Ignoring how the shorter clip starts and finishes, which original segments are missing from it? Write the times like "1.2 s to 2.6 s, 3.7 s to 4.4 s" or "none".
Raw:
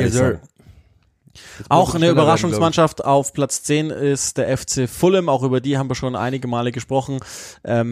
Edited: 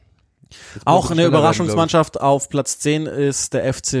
none